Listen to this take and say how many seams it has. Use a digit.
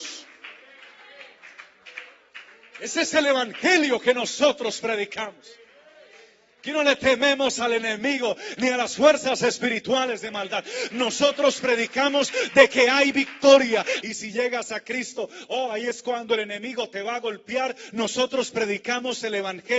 3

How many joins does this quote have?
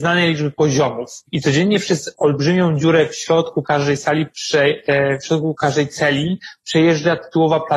1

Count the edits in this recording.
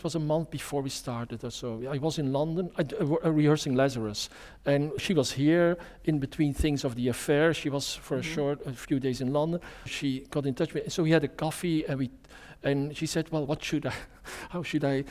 2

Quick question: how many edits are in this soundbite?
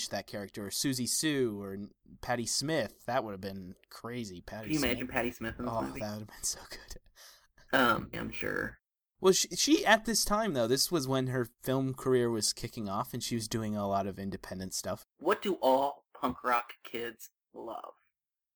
2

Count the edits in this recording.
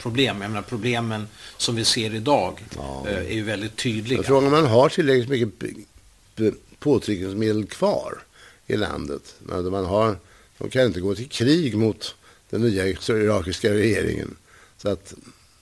0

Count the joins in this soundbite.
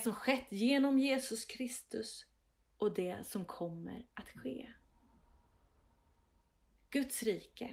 0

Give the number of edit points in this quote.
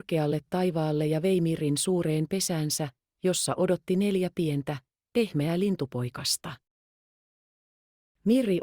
0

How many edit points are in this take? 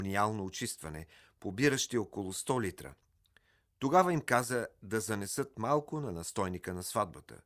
0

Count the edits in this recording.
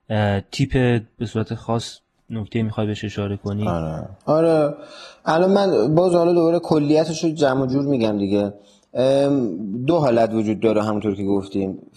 1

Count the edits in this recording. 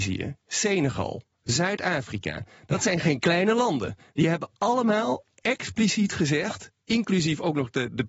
0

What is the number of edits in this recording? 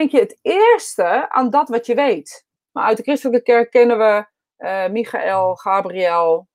1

